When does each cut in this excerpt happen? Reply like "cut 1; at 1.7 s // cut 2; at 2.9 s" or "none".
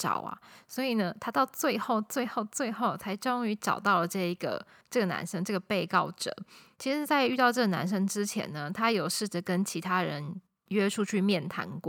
none